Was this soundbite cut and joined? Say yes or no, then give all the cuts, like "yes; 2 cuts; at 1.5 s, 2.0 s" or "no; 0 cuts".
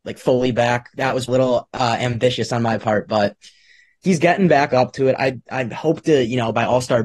yes; 1 cut; at 1.3 s